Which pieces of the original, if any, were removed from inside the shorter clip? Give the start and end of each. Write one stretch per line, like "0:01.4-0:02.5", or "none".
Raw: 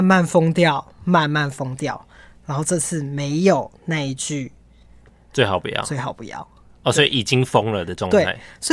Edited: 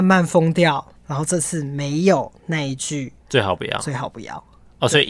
0:00.9-0:02.3
0:04.6-0:05.2